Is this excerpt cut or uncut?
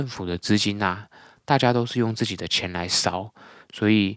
uncut